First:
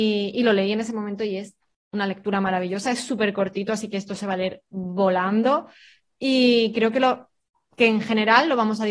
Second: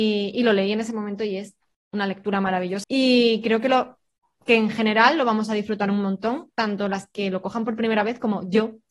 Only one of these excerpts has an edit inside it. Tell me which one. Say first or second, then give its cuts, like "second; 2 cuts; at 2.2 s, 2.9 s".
second; 1 cut; at 2.8 s